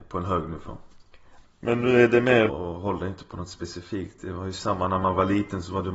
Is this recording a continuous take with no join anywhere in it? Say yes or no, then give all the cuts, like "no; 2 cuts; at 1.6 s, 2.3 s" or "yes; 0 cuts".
no; 2 cuts; at 1.4 s, 2.5 s